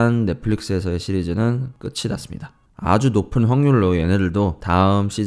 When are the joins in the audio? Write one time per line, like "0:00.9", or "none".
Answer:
0:02.6

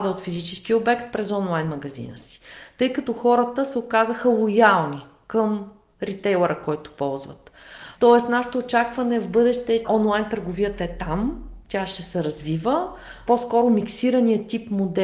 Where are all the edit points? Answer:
0:07.9
0:09.8
0:13.3

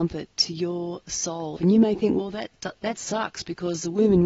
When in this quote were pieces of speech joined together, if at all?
0:01.6

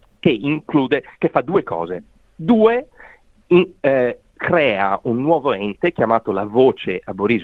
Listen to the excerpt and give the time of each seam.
0:02.2

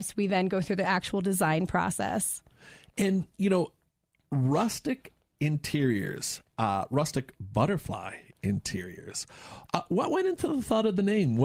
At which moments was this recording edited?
none

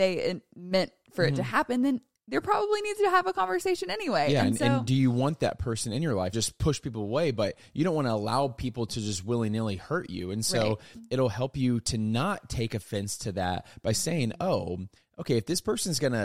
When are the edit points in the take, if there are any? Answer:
0:06.3

